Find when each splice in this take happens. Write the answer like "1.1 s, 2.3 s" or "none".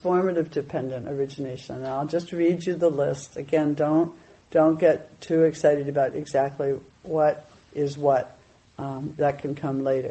6.9 s

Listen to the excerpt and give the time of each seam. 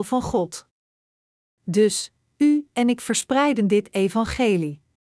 none

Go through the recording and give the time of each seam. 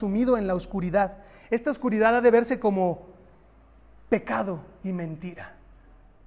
none

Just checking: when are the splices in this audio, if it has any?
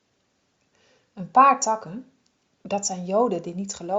none

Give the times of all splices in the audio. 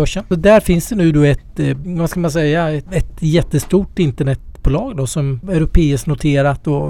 none

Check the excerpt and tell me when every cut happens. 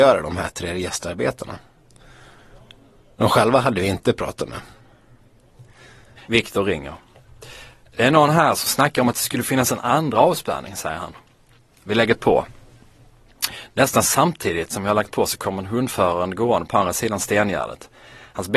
6.2 s

